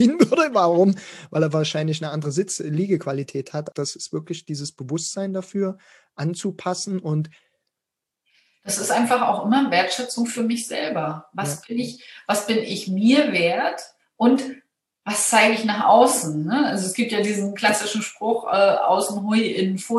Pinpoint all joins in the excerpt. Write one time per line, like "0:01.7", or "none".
0:03.7